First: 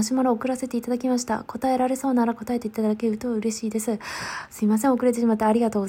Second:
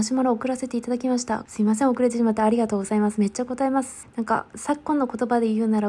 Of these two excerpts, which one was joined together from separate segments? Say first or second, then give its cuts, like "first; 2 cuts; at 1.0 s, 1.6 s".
second; 2 cuts; at 1.5 s, 4.0 s